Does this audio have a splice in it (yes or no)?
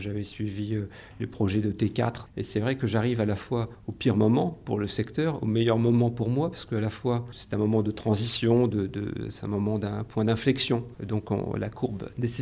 no